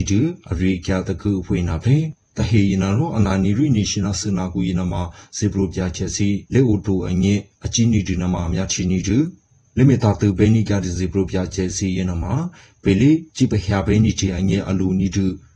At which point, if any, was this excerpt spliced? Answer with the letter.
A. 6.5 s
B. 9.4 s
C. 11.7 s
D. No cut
A